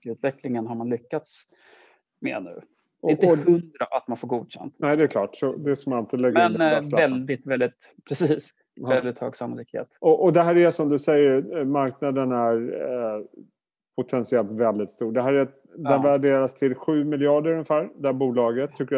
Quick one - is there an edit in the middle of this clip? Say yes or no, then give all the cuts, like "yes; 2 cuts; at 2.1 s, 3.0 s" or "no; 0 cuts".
no; 0 cuts